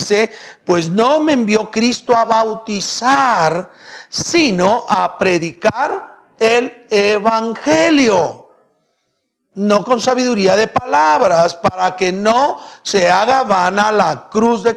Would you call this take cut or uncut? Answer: uncut